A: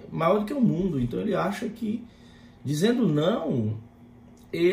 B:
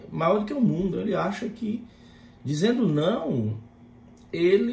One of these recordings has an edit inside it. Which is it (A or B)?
B